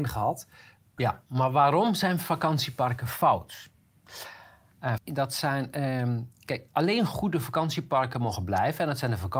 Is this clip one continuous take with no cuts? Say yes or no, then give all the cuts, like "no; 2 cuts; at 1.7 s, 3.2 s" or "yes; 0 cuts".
no; 2 cuts; at 1.0 s, 5.0 s